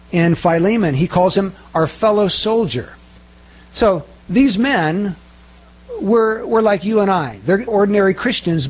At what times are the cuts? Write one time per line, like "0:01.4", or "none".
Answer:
0:07.7